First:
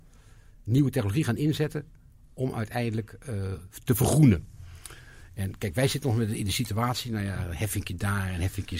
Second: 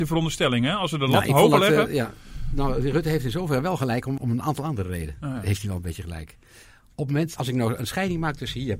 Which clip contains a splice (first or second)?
second